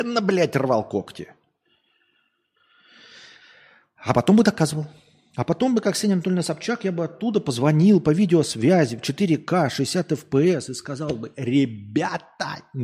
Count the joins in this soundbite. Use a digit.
0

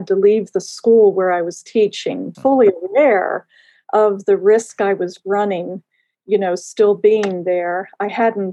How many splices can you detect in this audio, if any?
1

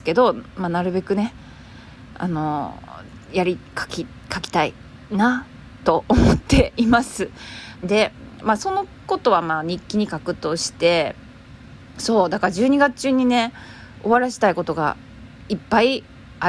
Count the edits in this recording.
1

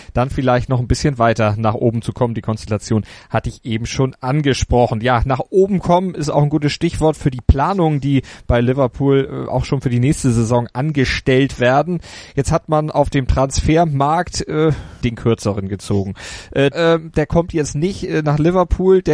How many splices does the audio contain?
2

